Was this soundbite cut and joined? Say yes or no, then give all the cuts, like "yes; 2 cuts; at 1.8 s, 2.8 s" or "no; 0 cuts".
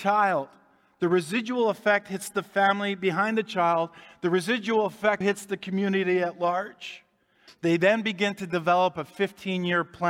yes; 2 cuts; at 5.2 s, 7.5 s